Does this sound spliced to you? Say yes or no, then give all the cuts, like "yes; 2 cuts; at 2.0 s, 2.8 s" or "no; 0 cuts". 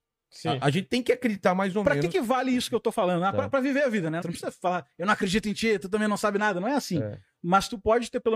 yes; 1 cut; at 4.2 s